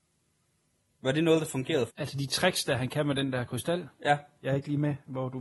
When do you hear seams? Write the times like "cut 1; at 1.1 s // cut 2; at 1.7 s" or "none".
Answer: cut 1; at 1.9 s // cut 2; at 4.4 s